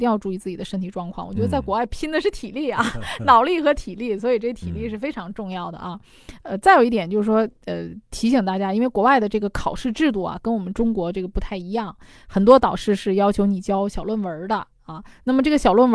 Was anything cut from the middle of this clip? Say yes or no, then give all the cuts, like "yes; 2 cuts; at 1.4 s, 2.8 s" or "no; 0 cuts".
no; 0 cuts